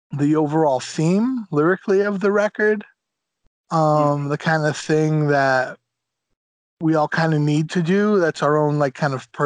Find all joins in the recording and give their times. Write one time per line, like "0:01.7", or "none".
none